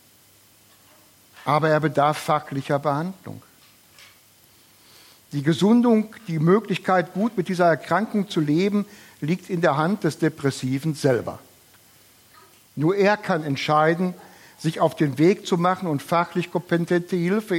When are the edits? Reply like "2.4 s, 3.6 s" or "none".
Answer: none

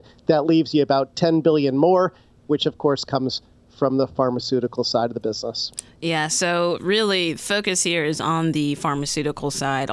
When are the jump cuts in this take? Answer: none

